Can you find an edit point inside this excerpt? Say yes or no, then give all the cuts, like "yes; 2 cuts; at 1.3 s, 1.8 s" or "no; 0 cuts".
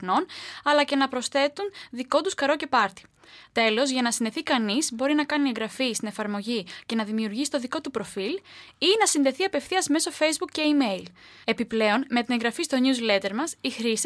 no; 0 cuts